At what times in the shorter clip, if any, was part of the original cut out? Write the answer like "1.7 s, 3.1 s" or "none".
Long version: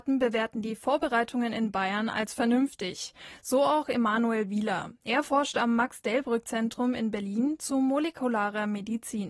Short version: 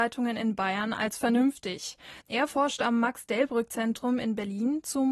2.2 s